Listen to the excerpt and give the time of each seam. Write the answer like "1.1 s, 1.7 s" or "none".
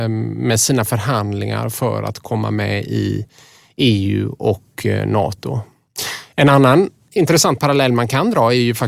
none